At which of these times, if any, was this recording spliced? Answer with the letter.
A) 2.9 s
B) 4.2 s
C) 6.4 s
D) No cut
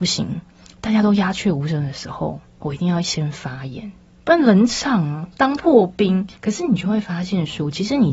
C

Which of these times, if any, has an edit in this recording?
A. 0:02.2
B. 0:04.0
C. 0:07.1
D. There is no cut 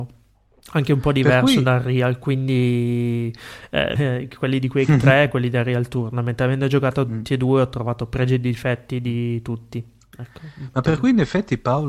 B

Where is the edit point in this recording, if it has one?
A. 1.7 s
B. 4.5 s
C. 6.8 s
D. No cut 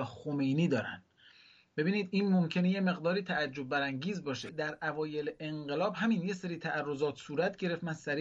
B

